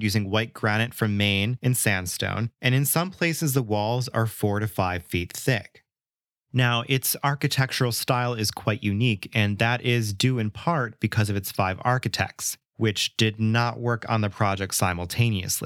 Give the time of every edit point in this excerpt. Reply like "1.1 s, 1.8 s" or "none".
none